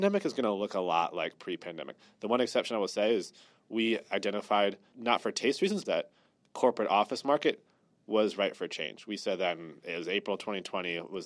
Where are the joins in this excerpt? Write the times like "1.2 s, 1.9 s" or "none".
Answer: 5.8 s